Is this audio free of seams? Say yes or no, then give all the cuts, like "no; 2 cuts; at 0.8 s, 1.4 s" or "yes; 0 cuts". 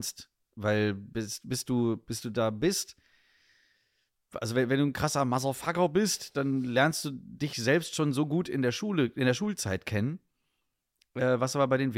yes; 0 cuts